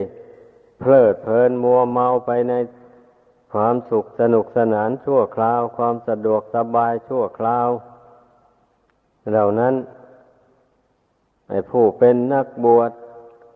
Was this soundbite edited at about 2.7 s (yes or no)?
no